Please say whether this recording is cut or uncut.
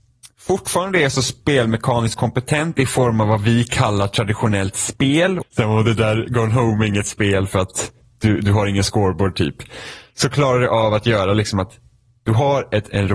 cut